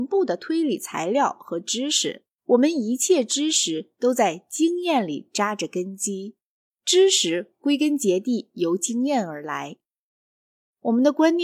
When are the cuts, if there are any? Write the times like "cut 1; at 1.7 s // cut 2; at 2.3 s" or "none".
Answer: cut 1; at 2.4 s

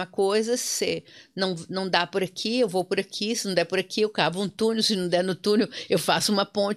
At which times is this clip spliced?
none

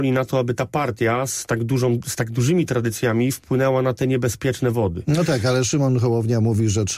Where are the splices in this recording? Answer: none

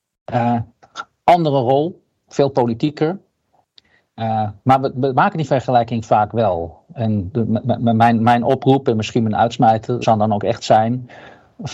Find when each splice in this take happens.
cut 1; at 2.3 s // cut 2; at 10.0 s

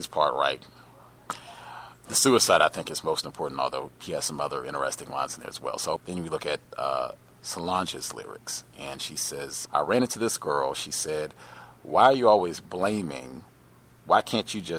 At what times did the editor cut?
cut 1; at 6.0 s // cut 2; at 9.7 s

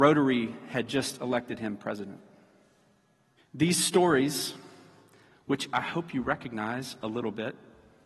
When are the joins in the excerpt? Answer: cut 1; at 3.4 s

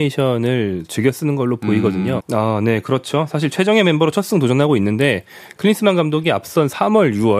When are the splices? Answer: cut 1; at 2.2 s

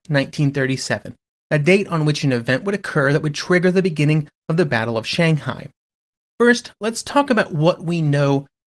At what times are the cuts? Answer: none

